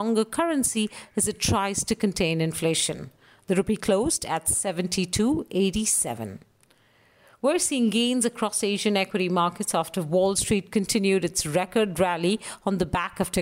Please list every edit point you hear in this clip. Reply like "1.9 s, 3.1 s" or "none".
none